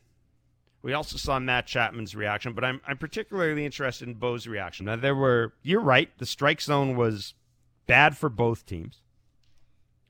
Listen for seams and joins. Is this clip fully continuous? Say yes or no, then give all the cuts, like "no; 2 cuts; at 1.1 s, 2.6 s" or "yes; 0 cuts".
no; 1 cut; at 4.8 s